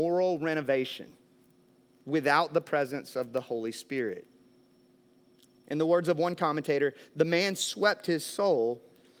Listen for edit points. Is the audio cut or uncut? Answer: uncut